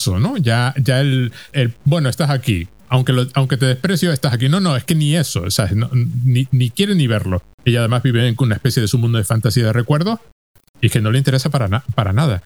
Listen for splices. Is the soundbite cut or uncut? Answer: cut